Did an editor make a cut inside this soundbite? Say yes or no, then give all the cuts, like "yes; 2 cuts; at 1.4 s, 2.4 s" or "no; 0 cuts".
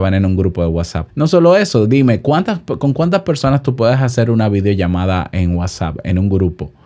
yes; 1 cut; at 1.1 s